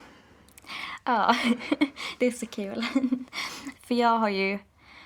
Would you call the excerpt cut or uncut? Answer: cut